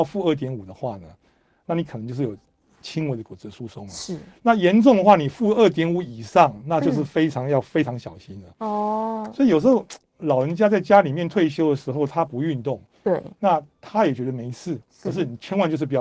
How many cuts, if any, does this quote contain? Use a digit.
0